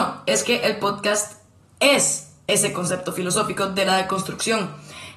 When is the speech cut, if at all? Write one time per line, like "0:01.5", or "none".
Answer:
none